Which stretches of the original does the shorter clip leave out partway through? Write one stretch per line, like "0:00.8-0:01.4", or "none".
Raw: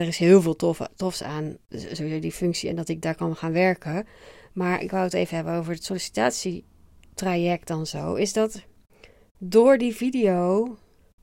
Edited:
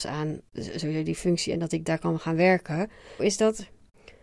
0:04.4-0:08.1